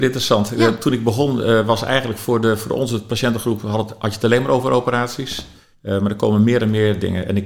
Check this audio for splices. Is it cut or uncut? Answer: cut